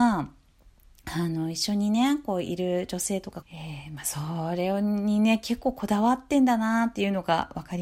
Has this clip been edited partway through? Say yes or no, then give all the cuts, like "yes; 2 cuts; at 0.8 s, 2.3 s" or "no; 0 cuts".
yes; 1 cut; at 3.4 s